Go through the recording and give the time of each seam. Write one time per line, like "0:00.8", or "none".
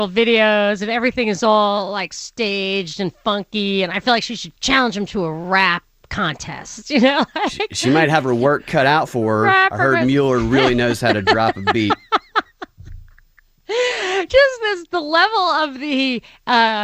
0:04.6